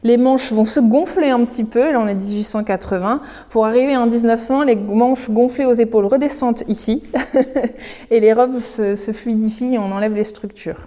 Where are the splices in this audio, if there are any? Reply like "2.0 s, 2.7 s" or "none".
none